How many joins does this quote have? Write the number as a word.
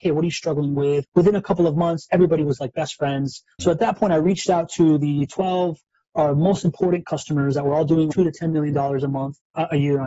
two